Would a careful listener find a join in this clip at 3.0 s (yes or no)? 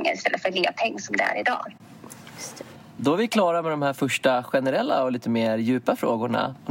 yes